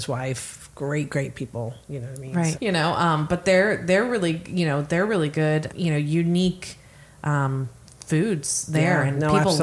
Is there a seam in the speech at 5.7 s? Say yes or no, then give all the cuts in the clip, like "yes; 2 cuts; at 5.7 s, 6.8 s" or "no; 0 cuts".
yes; 2 cuts; at 2.5 s, 5.7 s